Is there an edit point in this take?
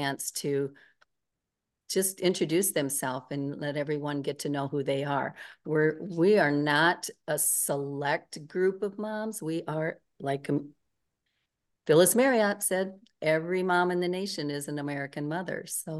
no; 0 cuts

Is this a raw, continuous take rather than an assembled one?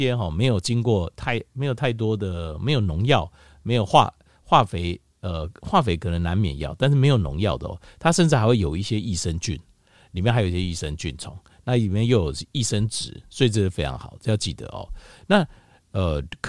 yes; 0 cuts

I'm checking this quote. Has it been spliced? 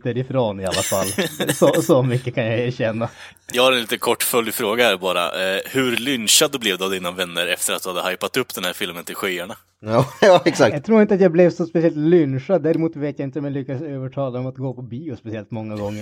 no; 0 cuts

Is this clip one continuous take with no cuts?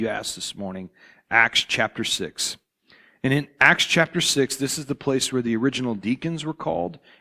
yes; 0 cuts

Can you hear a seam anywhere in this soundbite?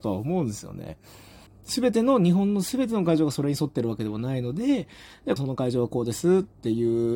yes; 2 cuts; at 1.5 s, 5.4 s

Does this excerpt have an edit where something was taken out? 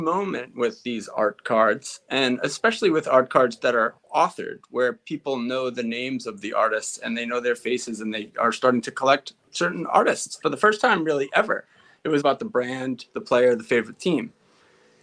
yes; 1 cut; at 12.2 s

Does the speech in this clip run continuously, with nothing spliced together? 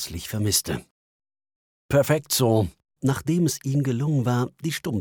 no; 1 cut; at 3.0 s

